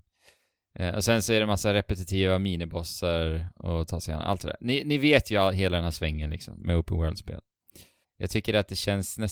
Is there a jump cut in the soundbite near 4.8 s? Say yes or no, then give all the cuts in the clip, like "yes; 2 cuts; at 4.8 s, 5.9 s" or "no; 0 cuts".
no; 1 cut; at 8.0 s